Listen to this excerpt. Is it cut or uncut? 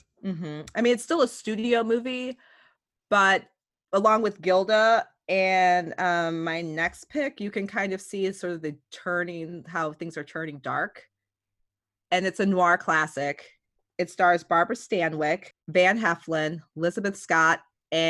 cut